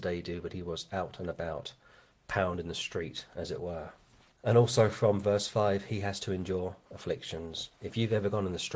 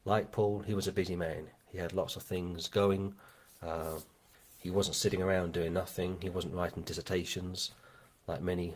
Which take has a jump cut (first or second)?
second